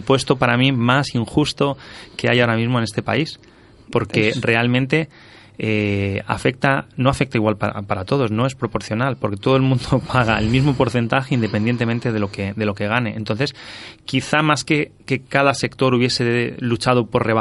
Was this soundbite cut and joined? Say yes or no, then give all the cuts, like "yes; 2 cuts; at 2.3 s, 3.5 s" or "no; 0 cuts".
no; 0 cuts